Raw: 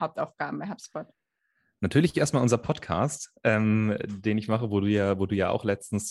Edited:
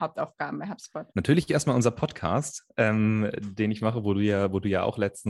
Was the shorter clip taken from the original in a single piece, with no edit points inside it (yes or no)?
no